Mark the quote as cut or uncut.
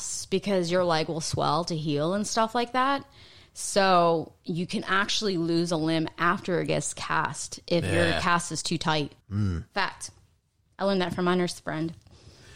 cut